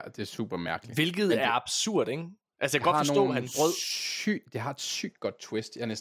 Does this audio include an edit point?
no; 0 cuts

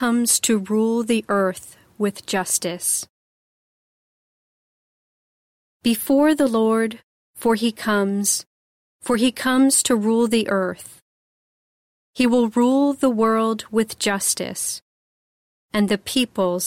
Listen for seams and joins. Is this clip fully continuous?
yes; 0 cuts

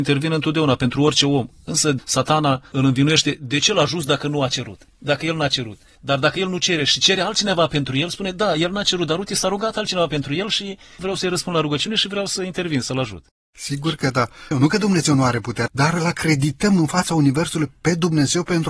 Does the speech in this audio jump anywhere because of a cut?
yes; 2 cuts; at 14.5 s, 15.7 s

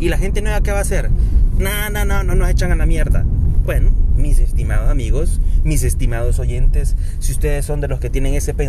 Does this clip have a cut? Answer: no; 0 cuts

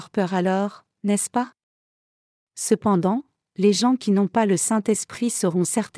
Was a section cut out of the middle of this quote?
no; 0 cuts

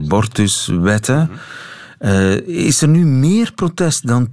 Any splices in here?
no; 0 cuts

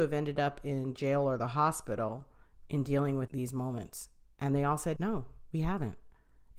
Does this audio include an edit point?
yes; 2 cuts; at 3.3 s, 5.0 s

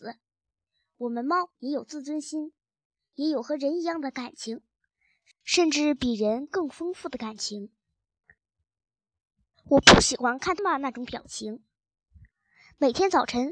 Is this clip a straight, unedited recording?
no; 2 cuts; at 9.5 s, 10.6 s

